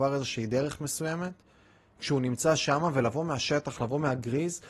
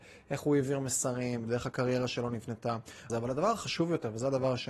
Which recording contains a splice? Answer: second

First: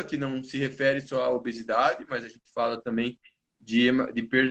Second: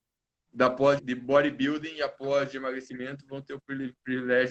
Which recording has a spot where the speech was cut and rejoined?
second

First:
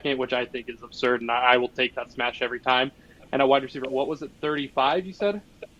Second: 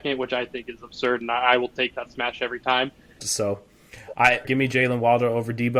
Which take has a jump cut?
second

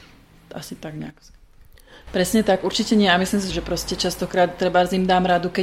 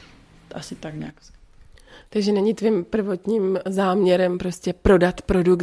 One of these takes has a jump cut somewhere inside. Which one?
first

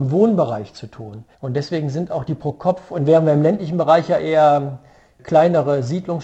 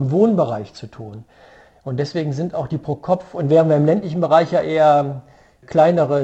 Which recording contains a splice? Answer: first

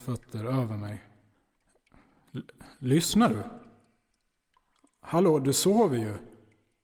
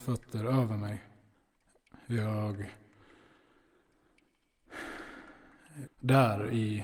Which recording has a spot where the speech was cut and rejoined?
second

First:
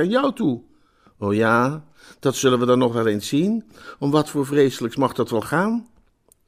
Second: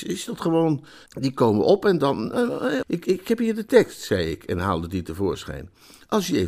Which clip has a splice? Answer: second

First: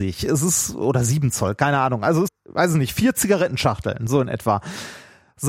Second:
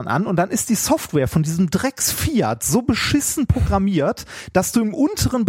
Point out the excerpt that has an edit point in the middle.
first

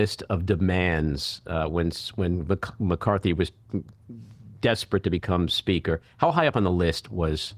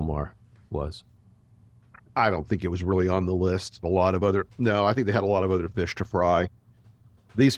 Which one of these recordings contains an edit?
second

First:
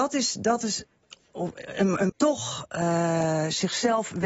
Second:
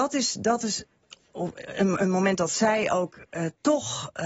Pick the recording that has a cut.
first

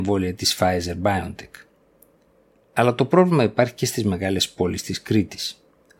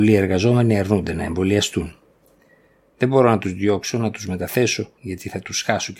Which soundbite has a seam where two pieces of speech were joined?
second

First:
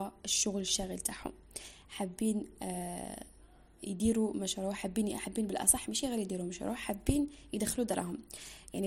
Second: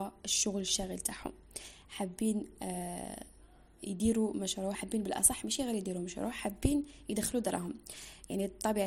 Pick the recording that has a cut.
second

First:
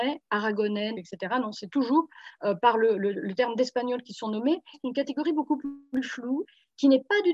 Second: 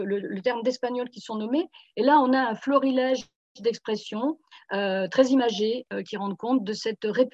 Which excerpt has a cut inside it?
first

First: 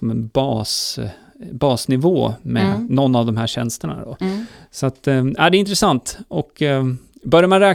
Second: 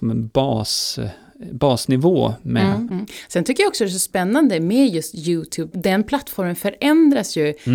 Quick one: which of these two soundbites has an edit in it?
second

